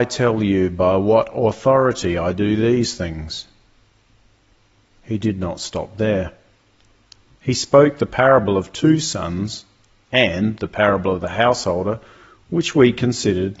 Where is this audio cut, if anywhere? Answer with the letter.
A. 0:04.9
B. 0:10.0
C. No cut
C